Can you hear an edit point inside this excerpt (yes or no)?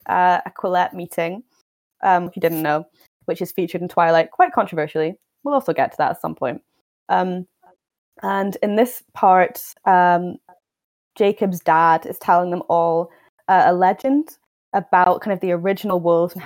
yes